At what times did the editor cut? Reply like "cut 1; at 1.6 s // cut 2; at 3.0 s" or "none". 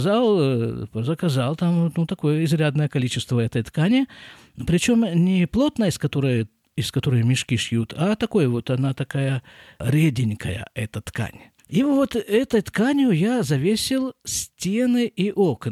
cut 1; at 11.6 s